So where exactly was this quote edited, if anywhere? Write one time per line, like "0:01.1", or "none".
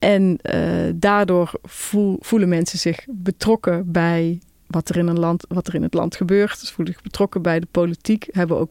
none